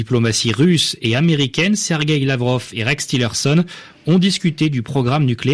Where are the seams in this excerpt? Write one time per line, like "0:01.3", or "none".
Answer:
none